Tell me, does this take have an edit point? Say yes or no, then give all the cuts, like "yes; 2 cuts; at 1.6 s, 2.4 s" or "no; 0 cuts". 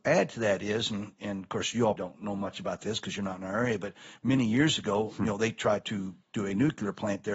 yes; 1 cut; at 2.0 s